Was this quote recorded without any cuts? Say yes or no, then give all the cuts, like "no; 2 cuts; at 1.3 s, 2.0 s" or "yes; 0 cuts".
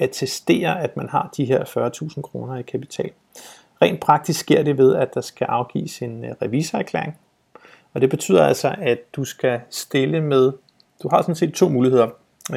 yes; 0 cuts